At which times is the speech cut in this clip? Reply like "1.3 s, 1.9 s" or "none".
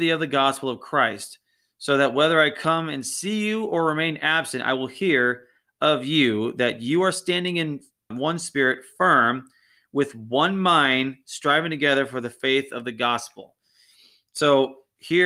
8.1 s